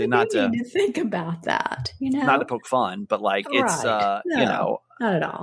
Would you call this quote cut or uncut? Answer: uncut